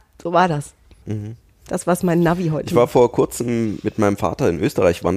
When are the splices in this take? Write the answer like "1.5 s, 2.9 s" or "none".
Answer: 1.0 s